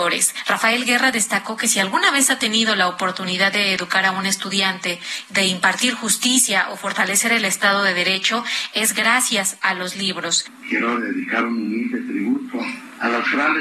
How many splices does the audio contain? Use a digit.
1